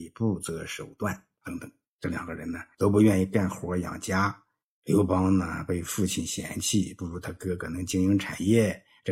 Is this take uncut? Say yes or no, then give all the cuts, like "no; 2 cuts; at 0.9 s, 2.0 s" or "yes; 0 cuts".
no; 1 cut; at 1.9 s